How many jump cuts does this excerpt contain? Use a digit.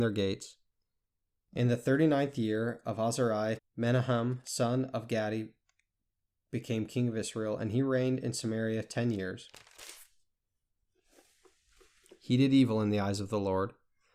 1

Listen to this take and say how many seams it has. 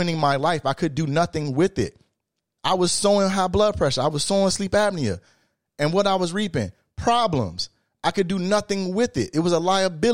1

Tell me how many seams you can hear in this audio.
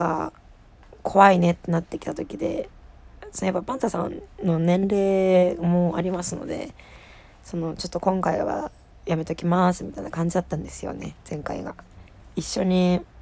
1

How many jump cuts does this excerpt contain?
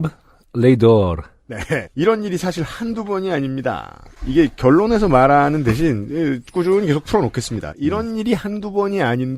1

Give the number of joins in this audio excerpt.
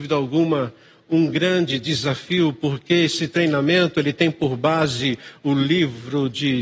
0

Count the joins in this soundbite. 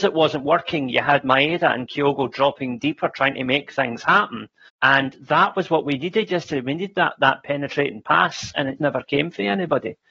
2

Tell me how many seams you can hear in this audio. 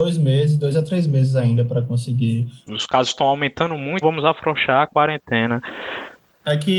2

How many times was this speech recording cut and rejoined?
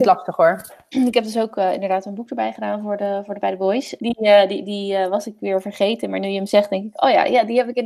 1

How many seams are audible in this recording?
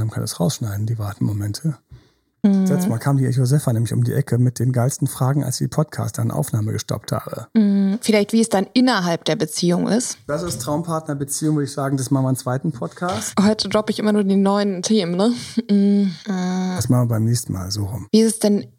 0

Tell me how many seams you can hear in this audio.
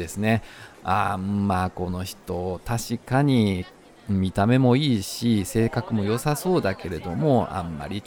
0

